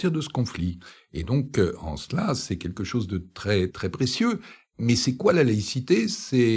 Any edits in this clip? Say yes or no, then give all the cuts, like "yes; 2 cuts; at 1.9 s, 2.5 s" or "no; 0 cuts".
yes; 1 cut; at 3.7 s